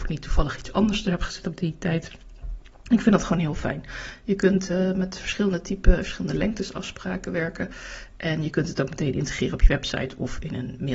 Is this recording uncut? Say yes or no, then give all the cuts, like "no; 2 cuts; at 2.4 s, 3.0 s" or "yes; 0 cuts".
yes; 0 cuts